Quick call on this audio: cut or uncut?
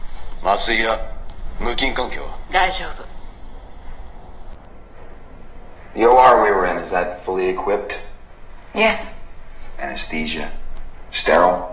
uncut